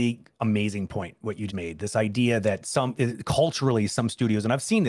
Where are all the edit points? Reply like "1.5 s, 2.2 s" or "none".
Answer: 1.5 s, 3.0 s